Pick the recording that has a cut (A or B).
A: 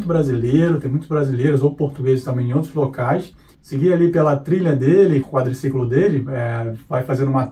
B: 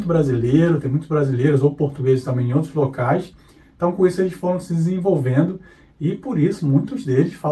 A